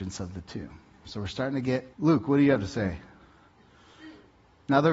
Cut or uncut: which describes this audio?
cut